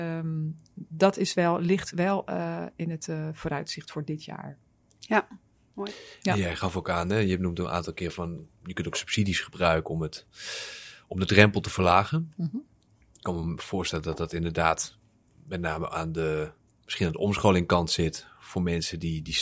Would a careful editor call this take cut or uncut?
uncut